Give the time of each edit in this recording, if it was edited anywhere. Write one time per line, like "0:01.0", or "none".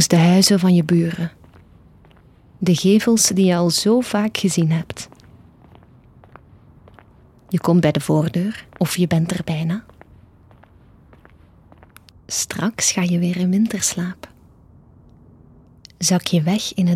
0:08.7
0:12.1